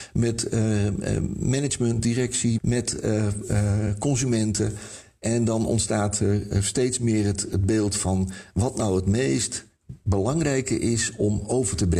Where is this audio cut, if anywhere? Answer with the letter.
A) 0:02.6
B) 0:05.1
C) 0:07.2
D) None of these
A